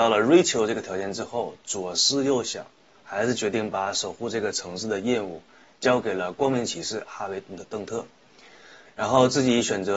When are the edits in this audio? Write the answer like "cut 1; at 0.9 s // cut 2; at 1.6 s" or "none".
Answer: none